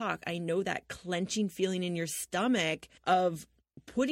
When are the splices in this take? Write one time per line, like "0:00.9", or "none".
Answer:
0:03.0